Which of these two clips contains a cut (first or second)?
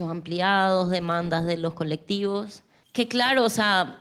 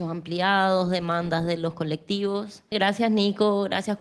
second